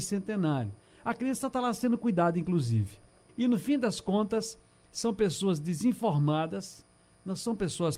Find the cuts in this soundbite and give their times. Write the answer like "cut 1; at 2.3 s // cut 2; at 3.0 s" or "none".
cut 1; at 3.3 s